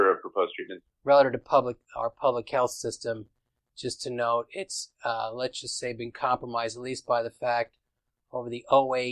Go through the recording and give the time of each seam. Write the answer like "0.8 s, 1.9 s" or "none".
0.9 s